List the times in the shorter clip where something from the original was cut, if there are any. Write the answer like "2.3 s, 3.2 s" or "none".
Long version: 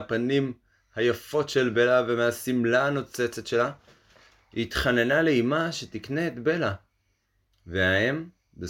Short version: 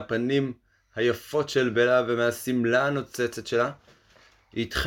none